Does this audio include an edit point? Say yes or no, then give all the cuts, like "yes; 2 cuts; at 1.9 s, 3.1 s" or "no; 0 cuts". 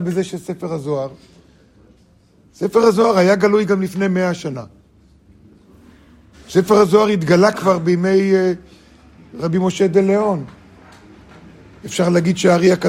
yes; 1 cut; at 6.3 s